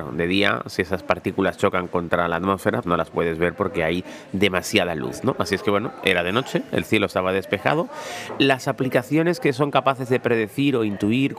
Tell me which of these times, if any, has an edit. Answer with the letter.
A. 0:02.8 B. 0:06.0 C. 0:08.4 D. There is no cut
A